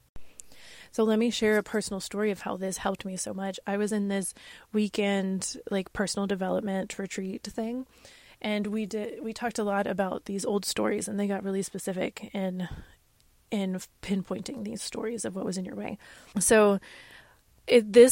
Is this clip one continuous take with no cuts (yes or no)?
no